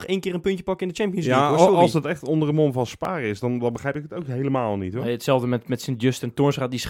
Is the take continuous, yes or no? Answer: yes